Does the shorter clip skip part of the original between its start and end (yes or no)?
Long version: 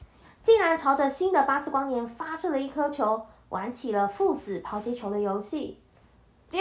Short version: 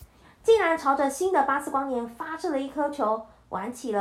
no